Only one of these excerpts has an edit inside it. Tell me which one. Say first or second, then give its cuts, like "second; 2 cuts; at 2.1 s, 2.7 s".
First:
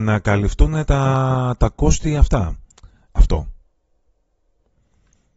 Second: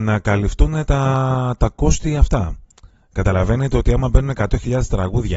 first; 1 cut; at 3.1 s